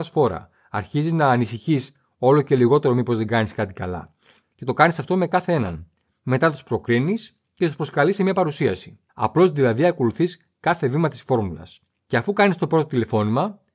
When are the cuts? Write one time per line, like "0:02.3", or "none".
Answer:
0:04.4
0:09.1